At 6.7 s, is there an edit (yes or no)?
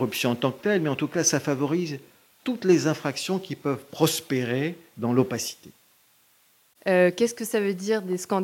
yes